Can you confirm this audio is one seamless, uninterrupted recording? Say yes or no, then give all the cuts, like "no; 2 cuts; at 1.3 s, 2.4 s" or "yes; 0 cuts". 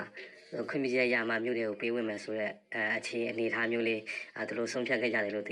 yes; 0 cuts